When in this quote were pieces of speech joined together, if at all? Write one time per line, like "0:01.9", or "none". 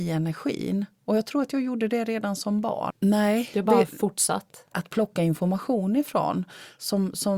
0:02.9
0:04.7